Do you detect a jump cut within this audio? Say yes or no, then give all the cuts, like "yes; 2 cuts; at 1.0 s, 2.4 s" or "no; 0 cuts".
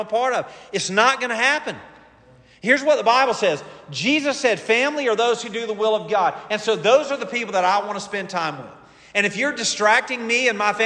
no; 0 cuts